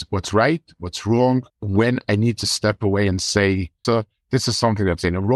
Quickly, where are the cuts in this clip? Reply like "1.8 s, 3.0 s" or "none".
1.5 s, 3.8 s